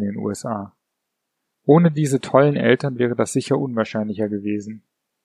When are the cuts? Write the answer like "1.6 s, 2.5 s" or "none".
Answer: none